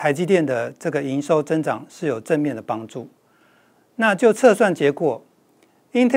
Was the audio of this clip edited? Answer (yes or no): no